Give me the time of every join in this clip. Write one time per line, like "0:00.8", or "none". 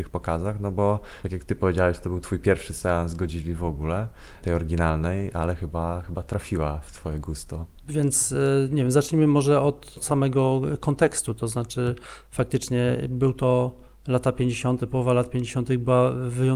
0:07.8